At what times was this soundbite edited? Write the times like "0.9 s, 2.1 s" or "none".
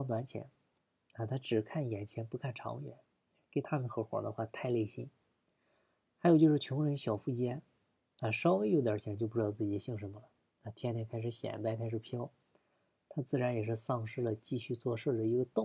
none